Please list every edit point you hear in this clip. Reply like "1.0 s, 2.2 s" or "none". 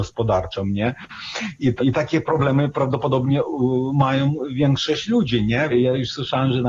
1.8 s, 5.7 s